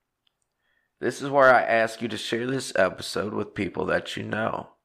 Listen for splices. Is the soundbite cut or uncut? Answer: uncut